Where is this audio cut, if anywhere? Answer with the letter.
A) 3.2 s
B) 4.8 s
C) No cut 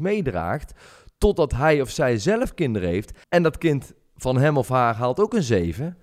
A